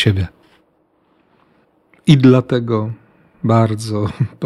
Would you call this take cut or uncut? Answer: uncut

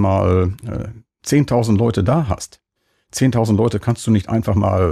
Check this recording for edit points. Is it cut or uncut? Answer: uncut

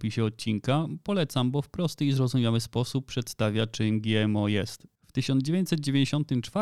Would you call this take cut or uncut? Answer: cut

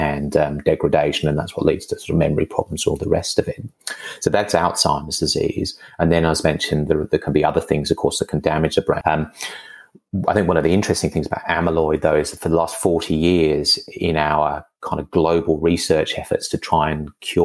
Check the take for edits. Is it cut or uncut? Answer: cut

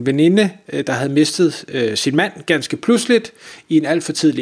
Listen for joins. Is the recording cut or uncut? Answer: uncut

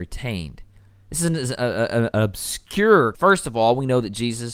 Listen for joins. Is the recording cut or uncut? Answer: cut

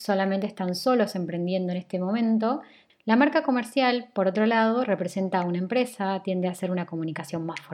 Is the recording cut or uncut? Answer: cut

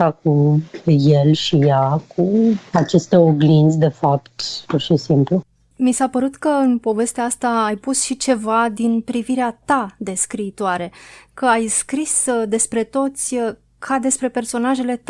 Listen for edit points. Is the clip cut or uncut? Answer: cut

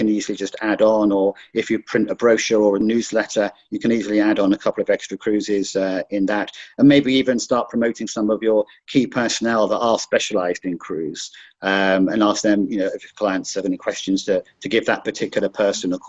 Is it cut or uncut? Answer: uncut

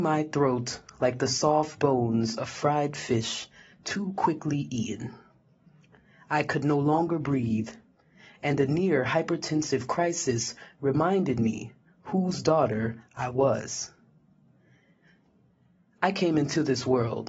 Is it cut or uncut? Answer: uncut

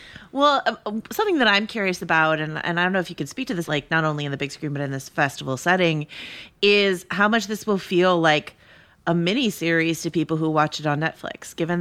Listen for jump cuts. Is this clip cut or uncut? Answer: cut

